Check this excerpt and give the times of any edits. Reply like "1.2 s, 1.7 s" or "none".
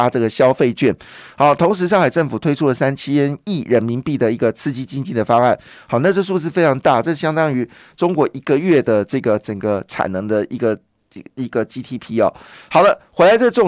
12.5 s